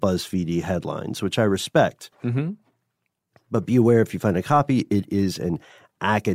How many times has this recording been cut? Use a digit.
0